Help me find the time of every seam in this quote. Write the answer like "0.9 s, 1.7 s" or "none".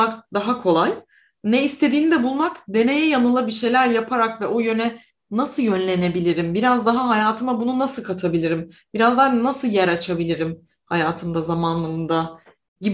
none